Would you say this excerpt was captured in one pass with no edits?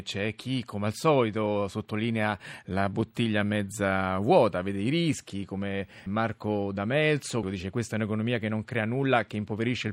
no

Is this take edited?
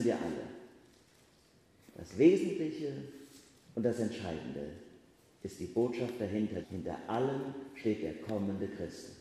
yes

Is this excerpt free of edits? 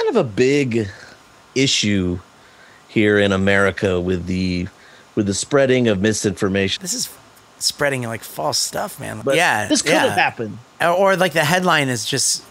no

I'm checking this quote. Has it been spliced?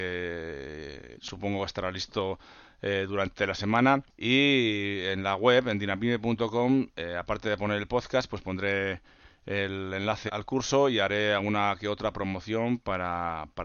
yes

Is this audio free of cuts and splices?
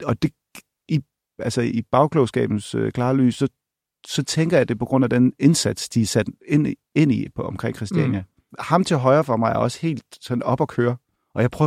yes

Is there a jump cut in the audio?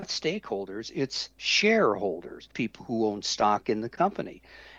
yes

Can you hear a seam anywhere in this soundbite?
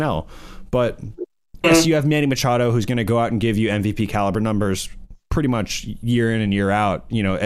yes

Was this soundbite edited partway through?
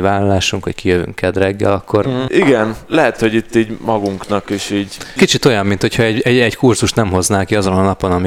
yes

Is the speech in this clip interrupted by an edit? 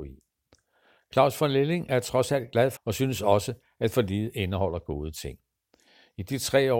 yes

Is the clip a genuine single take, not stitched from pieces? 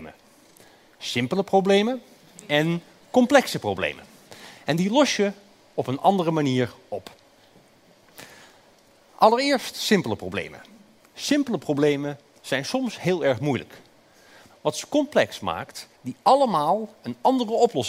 no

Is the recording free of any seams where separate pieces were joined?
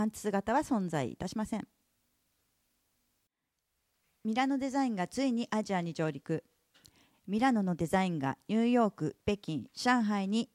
no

